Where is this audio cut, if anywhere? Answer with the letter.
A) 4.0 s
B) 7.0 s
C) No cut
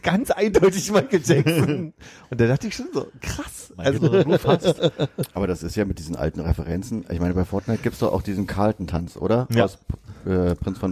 A